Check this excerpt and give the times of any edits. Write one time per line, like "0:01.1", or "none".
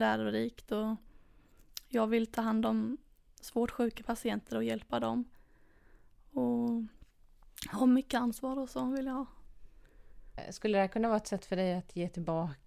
none

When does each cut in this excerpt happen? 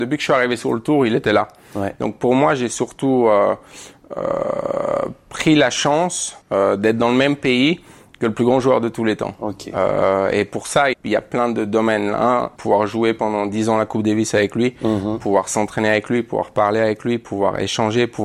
0:06.4
0:10.9
0:12.6

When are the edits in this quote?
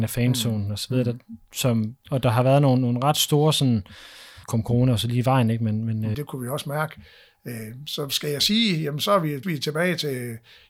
0:04.4
0:06.1
0:09.4

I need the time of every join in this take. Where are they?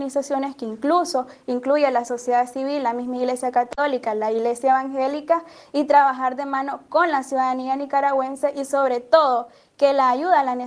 none

